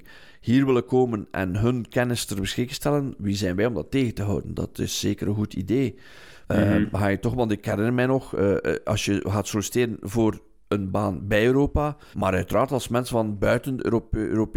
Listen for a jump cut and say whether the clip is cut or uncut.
cut